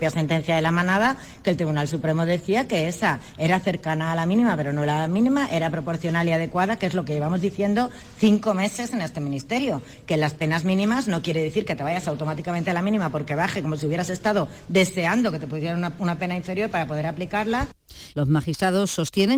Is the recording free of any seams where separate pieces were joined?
no; 1 cut; at 18.1 s

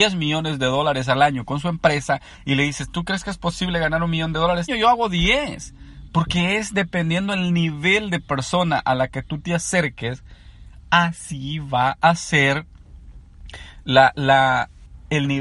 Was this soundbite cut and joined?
yes; 2 cuts; at 4.7 s, 6.1 s

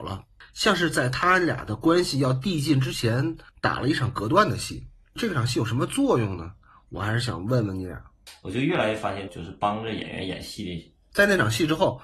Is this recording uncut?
no; 2 cuts; at 9.3 s, 11.1 s

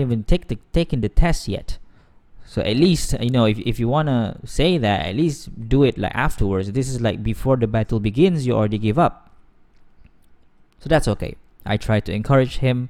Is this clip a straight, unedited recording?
yes; 0 cuts

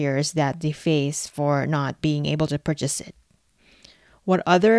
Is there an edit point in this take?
no; 0 cuts

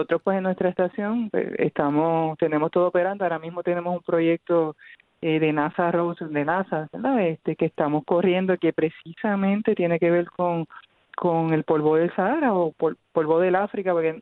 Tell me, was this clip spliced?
no; 0 cuts

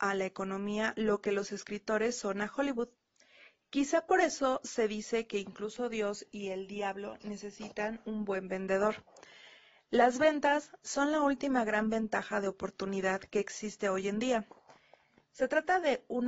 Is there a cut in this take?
no; 0 cuts

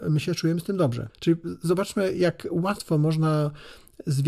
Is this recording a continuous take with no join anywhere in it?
no; 1 cut; at 1.1 s

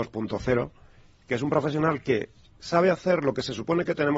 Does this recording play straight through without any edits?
yes; 0 cuts

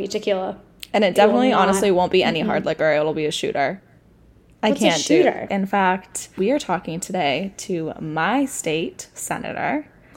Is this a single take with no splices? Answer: no; 1 cut; at 5.5 s

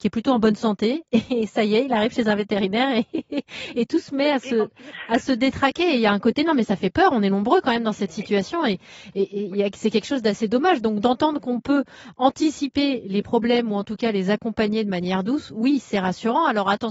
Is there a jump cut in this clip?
no; 0 cuts

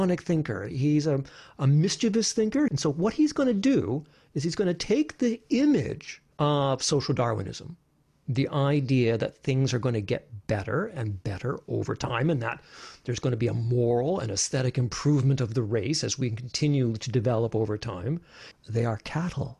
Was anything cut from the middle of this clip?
yes; 3 cuts; at 2.7 s, 6.3 s, 18.5 s

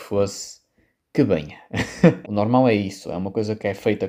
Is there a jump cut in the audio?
yes; 1 cut; at 2.2 s

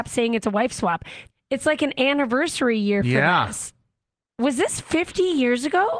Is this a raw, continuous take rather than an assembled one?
no; 1 cut; at 1.3 s

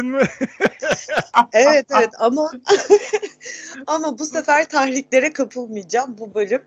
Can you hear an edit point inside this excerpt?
no; 0 cuts

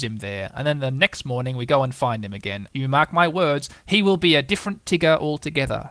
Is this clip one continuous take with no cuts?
no; 1 cut; at 2.7 s

